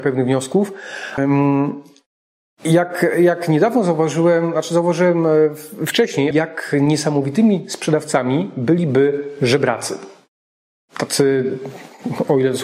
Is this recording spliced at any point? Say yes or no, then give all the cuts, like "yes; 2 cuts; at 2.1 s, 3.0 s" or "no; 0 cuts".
yes; 2 cuts; at 1.2 s, 6.3 s